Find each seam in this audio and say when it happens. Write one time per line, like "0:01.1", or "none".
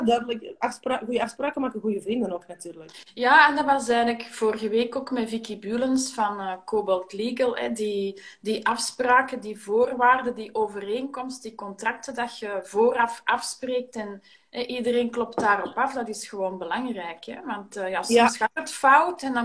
none